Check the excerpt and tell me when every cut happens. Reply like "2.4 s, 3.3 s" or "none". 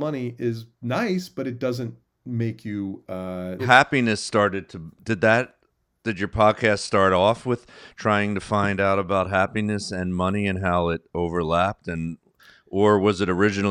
3.6 s